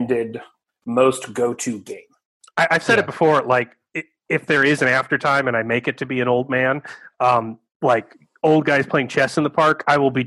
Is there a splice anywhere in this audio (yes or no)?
no